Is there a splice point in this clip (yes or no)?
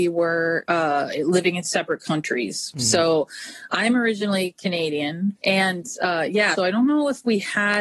yes